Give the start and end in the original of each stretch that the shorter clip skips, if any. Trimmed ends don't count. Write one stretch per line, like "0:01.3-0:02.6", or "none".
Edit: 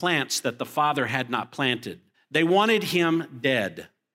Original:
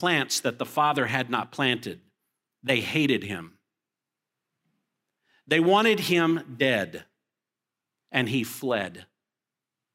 0:02.1-0:05.3